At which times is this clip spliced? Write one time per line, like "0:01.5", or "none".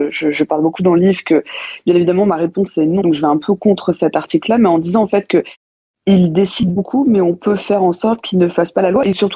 0:03.0